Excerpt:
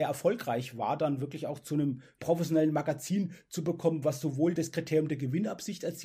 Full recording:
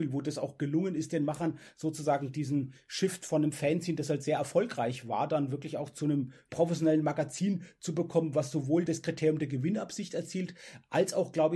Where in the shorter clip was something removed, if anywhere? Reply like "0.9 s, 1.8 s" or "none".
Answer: none